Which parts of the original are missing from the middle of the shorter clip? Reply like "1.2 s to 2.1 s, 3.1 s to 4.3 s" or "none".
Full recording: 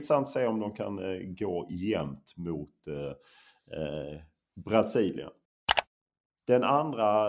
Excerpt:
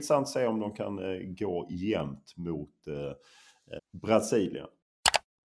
3.8 s to 4.4 s